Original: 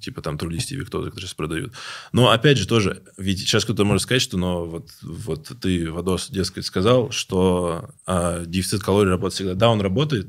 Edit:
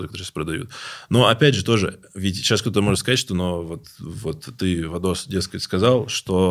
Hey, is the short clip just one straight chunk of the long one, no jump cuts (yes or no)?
yes